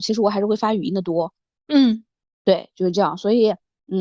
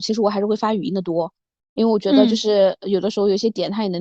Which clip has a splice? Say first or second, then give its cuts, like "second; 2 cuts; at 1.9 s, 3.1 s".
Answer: first; 1 cut; at 1.6 s